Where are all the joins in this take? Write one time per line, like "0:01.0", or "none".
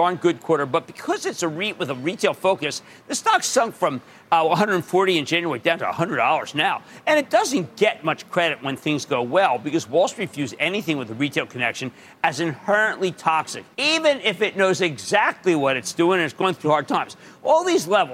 0:13.7
0:16.6